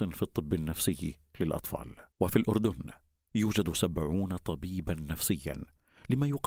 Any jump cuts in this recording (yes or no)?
yes